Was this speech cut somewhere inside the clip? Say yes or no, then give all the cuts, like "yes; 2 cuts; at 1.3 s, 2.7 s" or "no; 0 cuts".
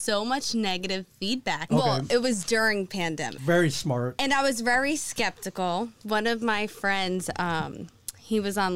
yes; 2 cuts; at 1.7 s, 3.4 s